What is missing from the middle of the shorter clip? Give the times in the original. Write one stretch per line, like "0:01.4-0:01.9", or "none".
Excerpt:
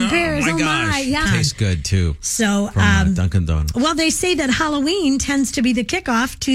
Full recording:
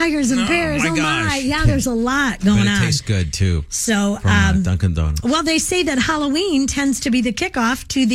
0:01.6-0:02.7